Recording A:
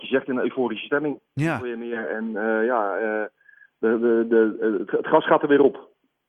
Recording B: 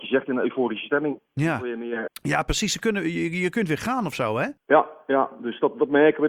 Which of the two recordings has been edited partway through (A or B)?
B